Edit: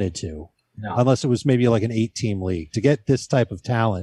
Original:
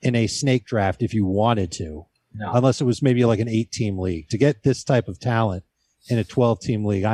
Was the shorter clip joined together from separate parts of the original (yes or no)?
no